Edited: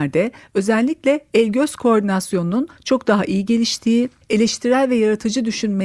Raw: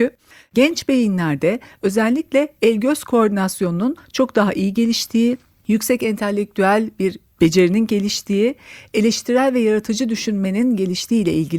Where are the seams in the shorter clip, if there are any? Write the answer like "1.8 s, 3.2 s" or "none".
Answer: 4.2 s